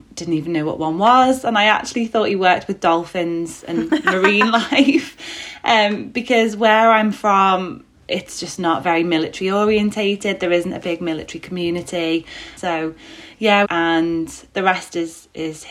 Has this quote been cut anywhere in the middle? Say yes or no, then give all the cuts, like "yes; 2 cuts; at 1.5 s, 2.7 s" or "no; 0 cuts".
yes; 2 cuts; at 12.6 s, 13.6 s